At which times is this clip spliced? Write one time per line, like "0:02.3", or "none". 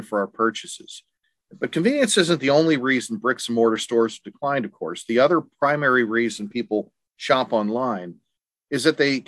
none